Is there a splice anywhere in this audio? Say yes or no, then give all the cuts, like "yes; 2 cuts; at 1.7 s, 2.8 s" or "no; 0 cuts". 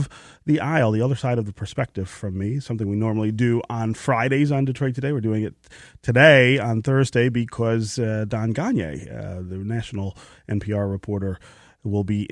no; 0 cuts